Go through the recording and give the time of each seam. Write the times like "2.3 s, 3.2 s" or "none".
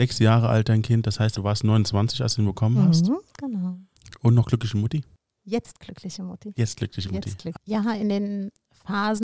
7.6 s